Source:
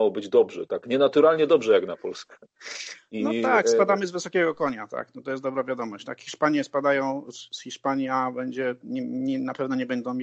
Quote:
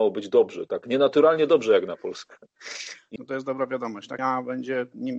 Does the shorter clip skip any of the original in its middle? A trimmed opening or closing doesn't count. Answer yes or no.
yes